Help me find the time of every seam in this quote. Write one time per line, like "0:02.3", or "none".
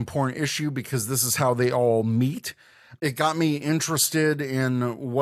0:03.0